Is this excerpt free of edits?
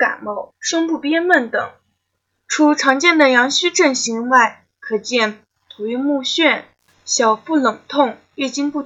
no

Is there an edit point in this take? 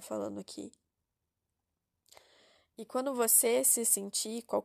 no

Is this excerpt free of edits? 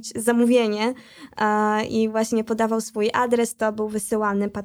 yes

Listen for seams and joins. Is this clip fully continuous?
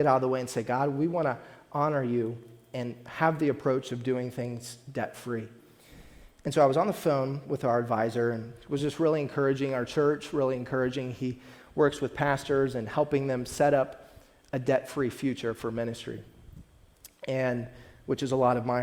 yes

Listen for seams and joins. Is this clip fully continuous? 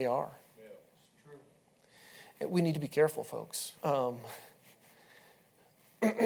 no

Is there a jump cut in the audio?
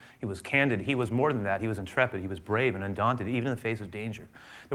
no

